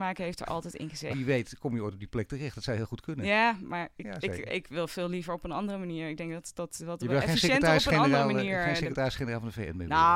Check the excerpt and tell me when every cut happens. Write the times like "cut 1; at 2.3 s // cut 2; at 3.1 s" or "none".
cut 1; at 1.1 s